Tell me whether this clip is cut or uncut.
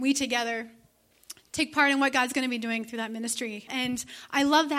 cut